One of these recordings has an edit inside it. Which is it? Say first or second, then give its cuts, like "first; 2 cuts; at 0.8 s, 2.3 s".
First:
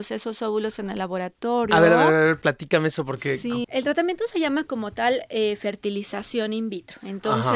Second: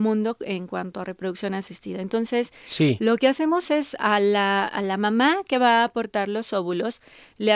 first; 1 cut; at 3.6 s